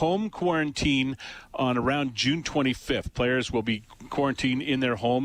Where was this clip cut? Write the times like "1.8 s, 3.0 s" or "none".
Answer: none